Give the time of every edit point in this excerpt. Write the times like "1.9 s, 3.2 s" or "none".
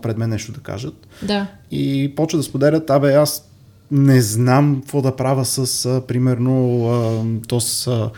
none

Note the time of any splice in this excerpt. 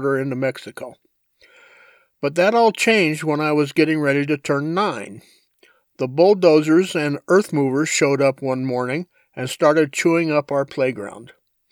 none

